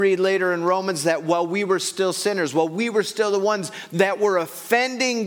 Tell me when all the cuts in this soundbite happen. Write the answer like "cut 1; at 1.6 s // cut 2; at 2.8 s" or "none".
none